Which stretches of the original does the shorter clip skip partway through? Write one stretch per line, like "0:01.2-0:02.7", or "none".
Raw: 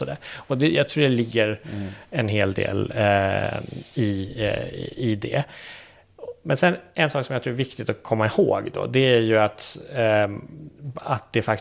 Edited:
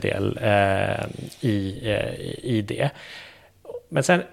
none